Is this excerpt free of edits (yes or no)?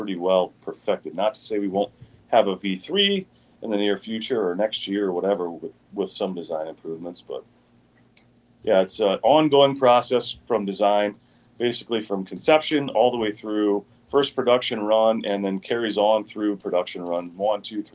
yes